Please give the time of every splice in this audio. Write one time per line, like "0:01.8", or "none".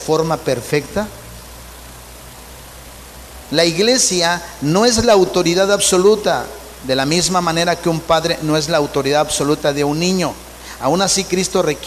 0:03.5

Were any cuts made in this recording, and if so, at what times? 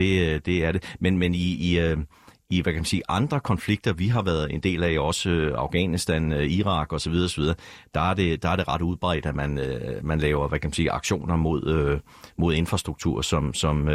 none

